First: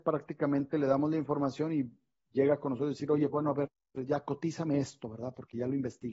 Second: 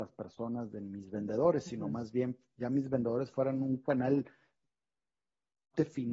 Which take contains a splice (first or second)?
first